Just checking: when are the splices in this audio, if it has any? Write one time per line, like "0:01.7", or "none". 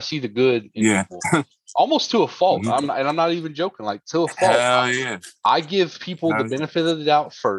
none